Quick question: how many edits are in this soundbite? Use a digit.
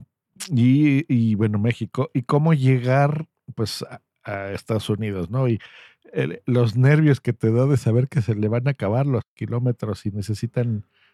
0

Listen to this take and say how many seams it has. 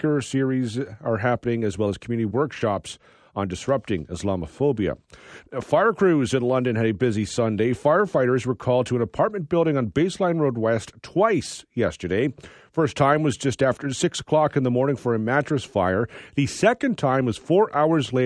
0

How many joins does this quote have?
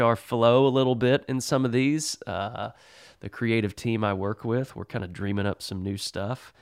0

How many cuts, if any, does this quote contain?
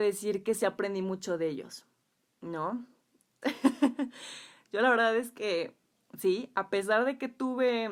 1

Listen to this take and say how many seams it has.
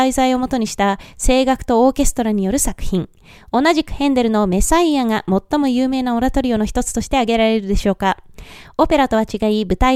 0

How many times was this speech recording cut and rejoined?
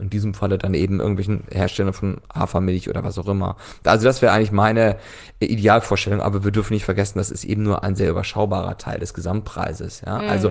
0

